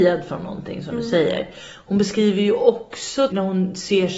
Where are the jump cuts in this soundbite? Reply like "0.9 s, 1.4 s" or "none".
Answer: 3.3 s